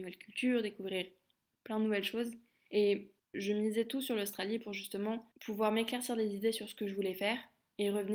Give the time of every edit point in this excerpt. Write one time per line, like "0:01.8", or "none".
0:02.7
0:05.3